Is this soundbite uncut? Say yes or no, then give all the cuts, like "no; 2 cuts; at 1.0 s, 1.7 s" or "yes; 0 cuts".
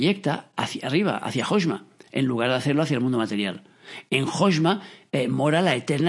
yes; 0 cuts